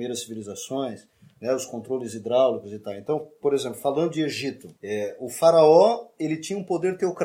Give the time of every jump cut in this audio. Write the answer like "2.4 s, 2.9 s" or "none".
4.8 s